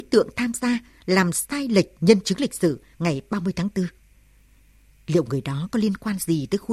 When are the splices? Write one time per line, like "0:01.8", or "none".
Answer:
none